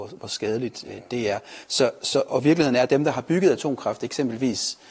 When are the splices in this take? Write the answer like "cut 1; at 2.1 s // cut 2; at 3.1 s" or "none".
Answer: none